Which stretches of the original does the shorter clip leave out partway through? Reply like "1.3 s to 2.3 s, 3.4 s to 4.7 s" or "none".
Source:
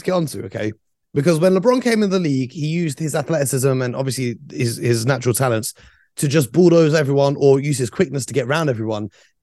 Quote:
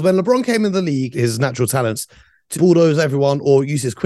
2.5 s to 4.8 s, 6.2 s to 6.5 s